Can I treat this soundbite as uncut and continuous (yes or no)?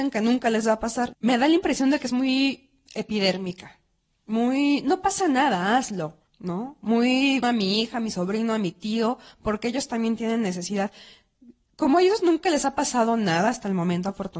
no